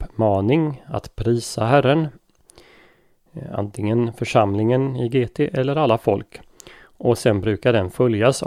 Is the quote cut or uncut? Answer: uncut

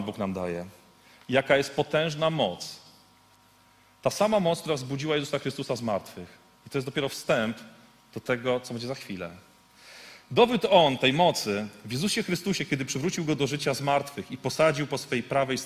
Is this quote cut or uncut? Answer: uncut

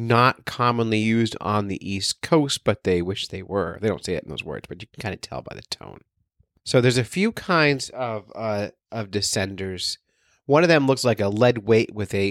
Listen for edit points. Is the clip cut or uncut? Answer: uncut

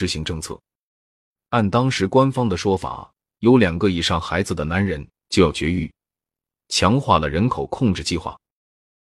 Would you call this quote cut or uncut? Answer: cut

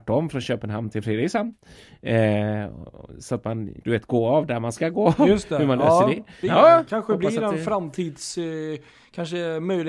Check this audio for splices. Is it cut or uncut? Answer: cut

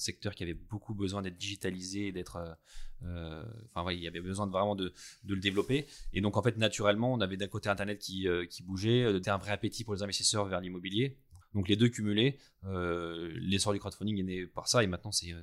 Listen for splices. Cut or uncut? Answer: cut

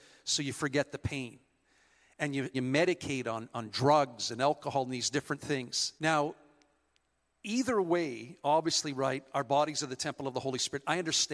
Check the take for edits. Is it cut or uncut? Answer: cut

